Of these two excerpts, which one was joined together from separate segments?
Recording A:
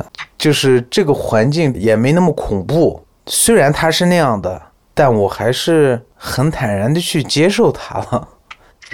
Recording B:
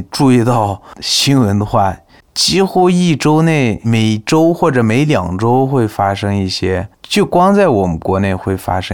A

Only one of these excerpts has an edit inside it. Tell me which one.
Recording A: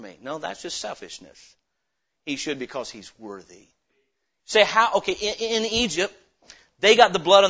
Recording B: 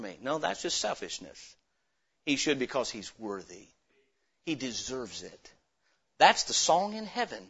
A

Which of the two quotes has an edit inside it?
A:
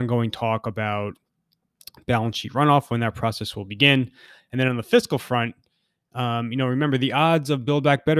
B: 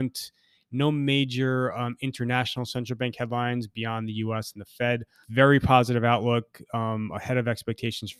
B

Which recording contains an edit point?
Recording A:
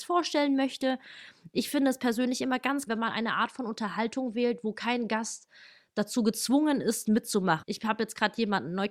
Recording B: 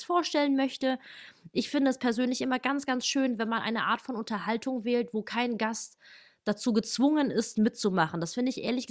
A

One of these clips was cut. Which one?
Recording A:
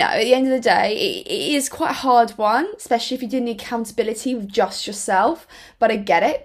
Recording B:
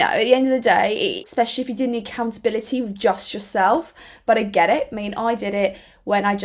B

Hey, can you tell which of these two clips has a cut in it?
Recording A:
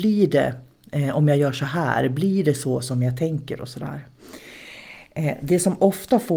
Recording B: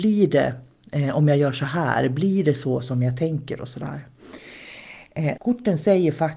B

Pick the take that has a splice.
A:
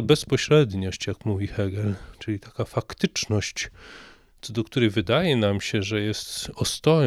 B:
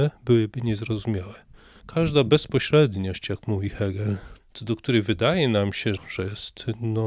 B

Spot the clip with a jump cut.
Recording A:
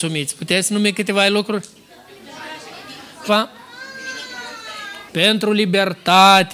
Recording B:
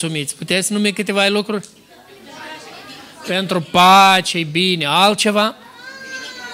A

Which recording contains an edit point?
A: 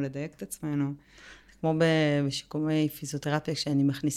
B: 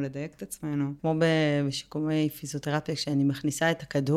B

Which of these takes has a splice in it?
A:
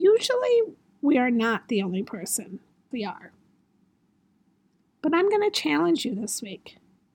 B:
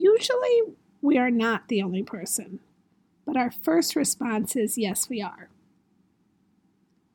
A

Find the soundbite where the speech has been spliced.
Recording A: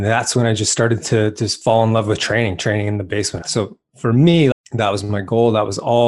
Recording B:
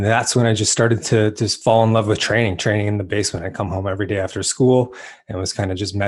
A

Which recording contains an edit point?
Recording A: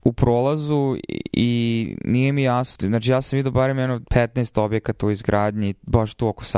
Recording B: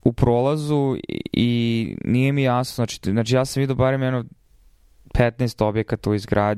A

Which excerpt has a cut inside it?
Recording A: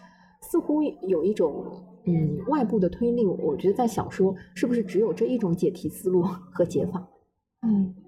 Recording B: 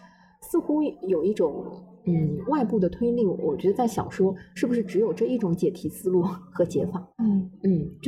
B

